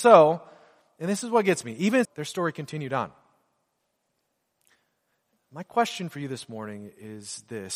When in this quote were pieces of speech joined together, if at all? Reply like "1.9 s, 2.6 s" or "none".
2.0 s